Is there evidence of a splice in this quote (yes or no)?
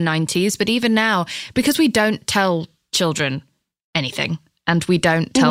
no